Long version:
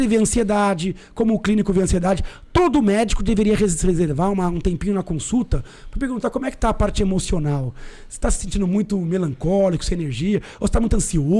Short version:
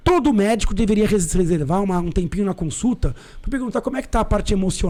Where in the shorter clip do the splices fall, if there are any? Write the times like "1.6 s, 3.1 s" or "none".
none